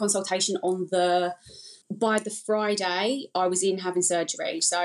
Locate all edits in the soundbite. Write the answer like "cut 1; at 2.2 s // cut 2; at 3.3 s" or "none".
cut 1; at 1.8 s